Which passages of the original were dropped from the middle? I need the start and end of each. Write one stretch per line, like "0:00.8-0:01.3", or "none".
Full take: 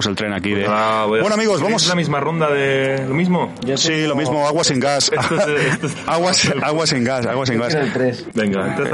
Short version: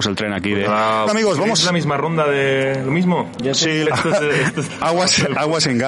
0:01.1-0:01.3
0:04.1-0:05.1

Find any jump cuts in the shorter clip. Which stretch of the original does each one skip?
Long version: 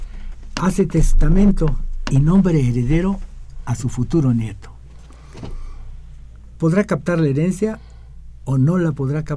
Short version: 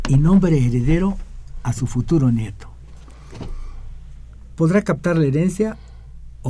none

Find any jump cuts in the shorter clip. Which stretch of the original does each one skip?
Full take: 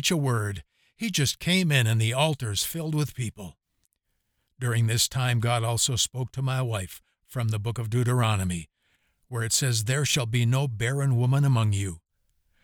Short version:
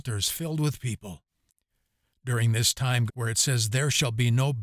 0:05.4-0:09.2

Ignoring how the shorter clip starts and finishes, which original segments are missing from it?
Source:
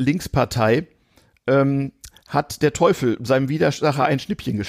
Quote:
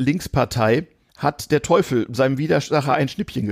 0:01.1-0:02.2

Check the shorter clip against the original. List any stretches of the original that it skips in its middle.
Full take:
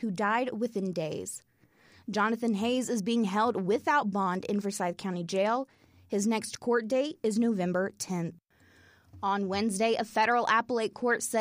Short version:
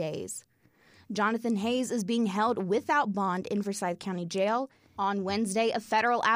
0:05.9-0:09.2

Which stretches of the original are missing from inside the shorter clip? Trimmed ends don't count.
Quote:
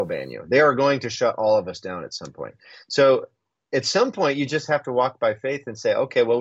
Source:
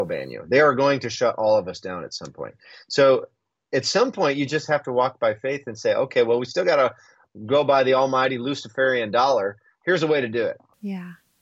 none

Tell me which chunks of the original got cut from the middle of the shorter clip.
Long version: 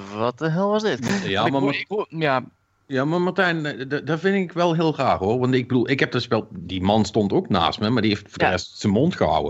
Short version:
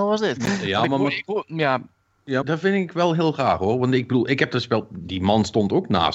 0:03.0-0:04.0

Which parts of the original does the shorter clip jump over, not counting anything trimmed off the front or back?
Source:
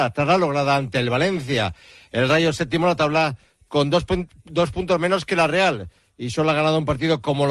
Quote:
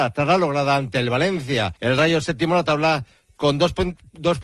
0:01.8-0:02.1

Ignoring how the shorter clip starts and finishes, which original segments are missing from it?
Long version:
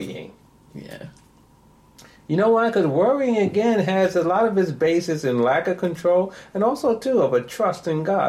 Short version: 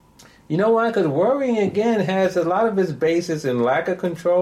none

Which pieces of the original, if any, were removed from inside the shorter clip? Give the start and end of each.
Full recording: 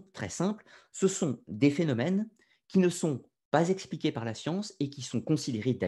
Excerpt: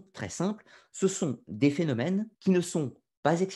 0:02.3-0:02.6

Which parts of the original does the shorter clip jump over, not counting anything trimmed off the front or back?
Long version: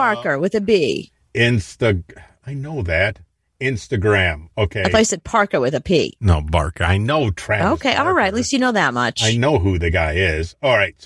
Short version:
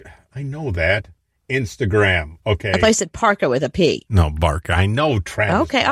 none

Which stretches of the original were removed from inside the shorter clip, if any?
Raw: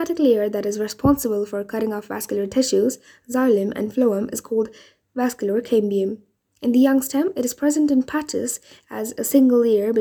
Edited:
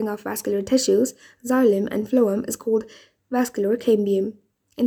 none

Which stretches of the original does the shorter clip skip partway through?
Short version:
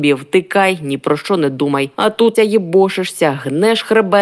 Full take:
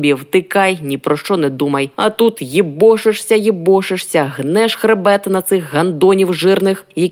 0:02.3-0:03.3

